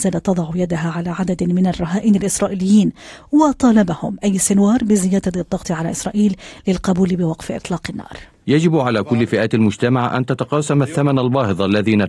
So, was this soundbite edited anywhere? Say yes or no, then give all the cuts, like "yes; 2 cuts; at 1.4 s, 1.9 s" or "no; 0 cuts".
yes; 1 cut; at 8.4 s